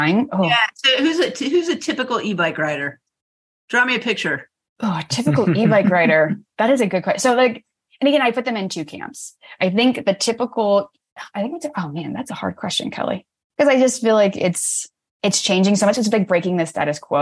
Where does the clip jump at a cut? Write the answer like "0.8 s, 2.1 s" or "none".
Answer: none